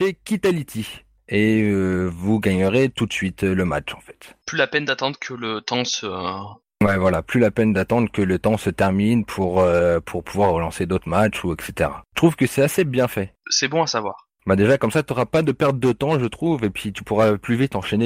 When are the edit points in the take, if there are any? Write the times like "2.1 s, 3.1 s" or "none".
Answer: none